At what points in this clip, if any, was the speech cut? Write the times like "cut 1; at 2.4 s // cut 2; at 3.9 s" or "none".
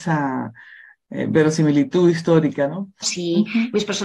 cut 1; at 3.0 s